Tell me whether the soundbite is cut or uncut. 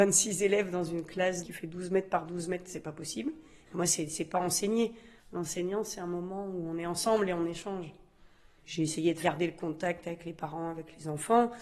cut